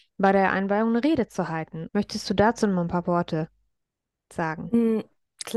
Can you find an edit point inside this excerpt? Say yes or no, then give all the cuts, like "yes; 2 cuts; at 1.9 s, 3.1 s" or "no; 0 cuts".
yes; 1 cut; at 1.9 s